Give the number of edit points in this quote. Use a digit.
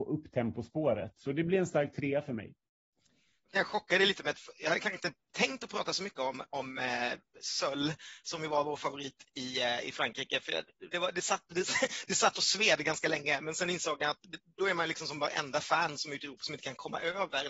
0